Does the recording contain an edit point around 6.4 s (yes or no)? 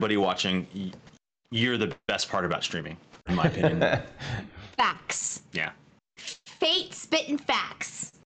no